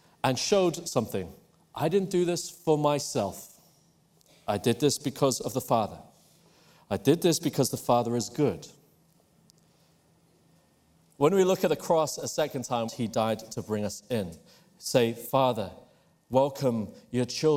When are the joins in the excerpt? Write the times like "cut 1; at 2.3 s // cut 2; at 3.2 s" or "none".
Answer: cut 1; at 11.2 s // cut 2; at 12.9 s

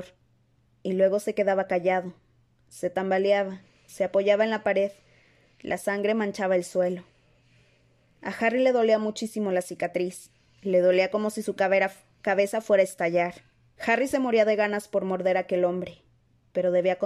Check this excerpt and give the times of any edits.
cut 1; at 13.8 s

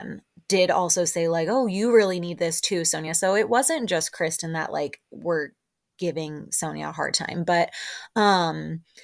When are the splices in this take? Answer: none

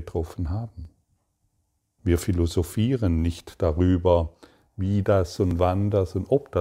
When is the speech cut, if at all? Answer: cut 1; at 2.0 s

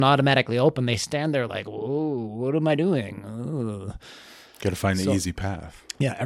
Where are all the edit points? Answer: none

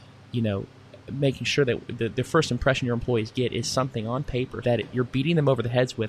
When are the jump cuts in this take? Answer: cut 1; at 4.6 s

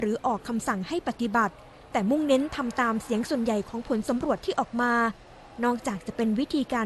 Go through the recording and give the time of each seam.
none

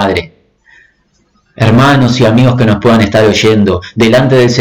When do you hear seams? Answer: none

